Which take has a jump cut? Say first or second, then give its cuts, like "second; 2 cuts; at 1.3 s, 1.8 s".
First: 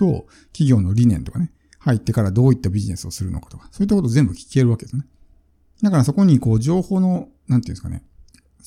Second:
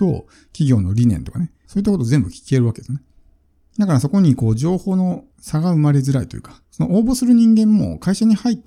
second; 3 cuts; at 1.6 s, 5.3 s, 6.6 s